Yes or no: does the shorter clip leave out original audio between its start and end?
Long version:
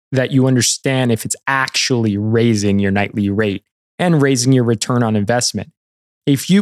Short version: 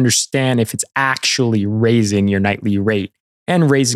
no